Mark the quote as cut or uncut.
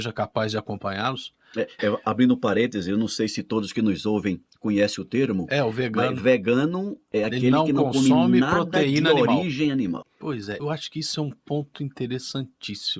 cut